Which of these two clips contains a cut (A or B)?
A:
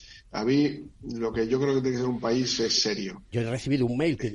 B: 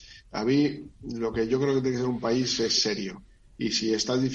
A